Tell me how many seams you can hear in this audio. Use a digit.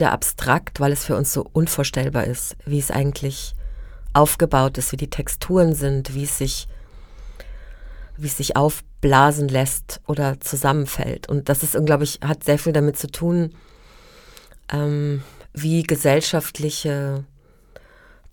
1